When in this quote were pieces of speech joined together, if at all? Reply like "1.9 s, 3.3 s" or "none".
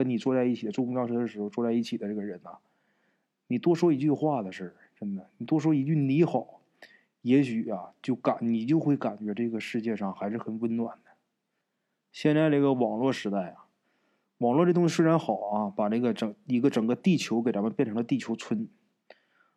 none